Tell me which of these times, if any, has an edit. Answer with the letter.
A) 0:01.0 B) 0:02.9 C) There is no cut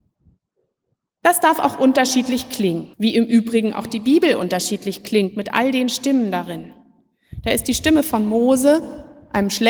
B